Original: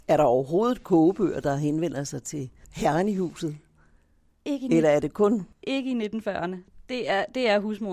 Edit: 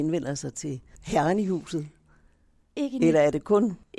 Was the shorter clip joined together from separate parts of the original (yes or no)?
no